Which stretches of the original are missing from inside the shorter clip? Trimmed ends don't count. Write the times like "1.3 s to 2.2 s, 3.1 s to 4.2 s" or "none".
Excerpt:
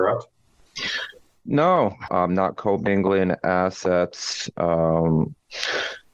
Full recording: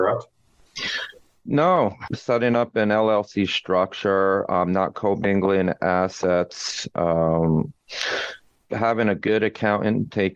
2.1 s to 4.5 s